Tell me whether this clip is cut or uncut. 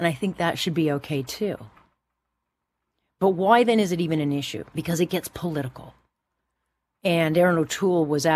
cut